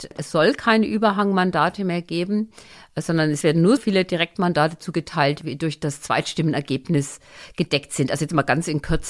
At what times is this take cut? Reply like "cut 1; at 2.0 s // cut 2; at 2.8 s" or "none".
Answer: cut 1; at 3.8 s